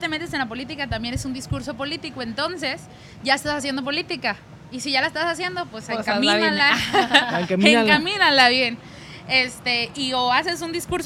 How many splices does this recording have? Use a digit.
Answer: 0